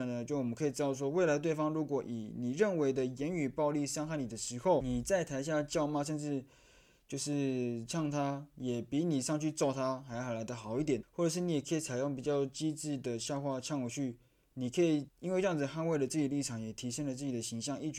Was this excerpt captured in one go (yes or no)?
yes